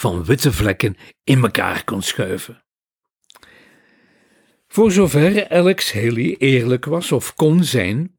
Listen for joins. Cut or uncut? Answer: uncut